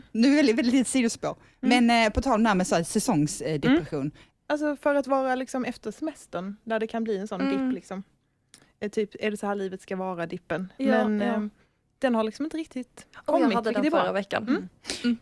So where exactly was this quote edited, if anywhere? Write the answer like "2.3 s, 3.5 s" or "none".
4.3 s